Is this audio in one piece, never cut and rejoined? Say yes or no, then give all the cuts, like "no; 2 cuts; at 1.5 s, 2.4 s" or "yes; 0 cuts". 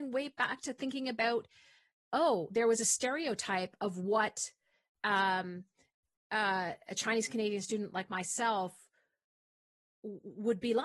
yes; 0 cuts